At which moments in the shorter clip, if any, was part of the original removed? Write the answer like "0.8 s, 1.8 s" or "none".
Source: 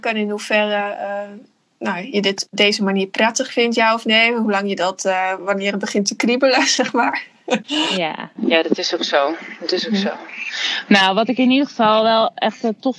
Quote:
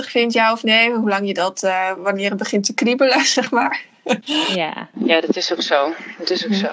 none